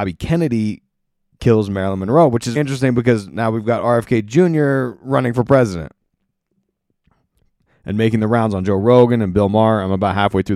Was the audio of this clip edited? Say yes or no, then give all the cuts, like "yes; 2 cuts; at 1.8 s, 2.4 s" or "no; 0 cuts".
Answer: yes; 1 cut; at 2.6 s